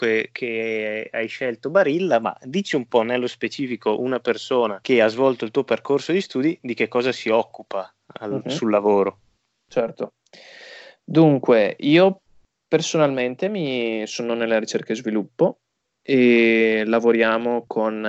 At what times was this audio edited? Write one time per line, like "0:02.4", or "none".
none